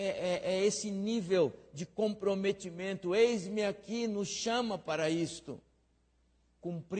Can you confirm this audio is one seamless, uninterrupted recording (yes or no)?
yes